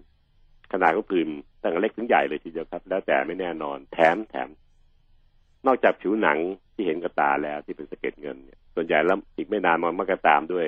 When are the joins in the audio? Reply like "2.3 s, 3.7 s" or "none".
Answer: 1.5 s, 8.7 s